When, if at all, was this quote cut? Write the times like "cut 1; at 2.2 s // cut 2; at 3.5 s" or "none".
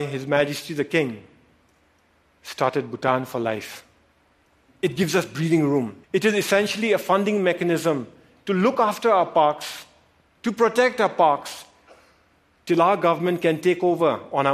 cut 1; at 4.7 s // cut 2; at 6.0 s